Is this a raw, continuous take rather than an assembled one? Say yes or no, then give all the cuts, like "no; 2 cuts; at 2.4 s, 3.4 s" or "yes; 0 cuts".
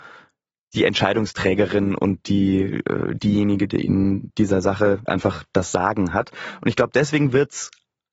no; 1 cut; at 5.1 s